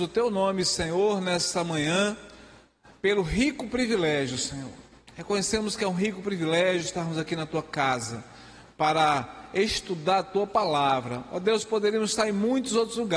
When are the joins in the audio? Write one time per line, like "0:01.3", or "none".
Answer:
none